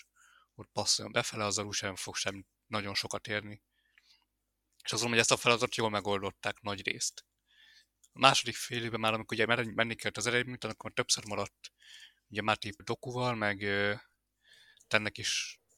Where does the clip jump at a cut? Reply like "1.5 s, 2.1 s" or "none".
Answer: 12.8 s

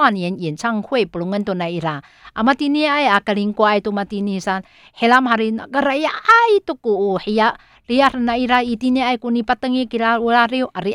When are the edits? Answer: none

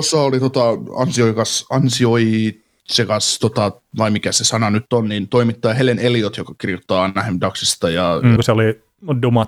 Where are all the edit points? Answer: 8.4 s

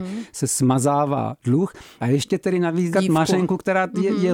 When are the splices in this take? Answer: 2.9 s

